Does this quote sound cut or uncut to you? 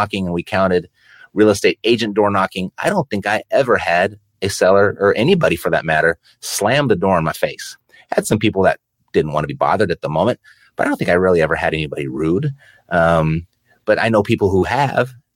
uncut